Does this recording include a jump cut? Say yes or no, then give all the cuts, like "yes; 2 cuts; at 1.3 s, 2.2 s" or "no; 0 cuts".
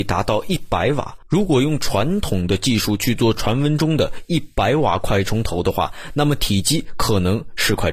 no; 0 cuts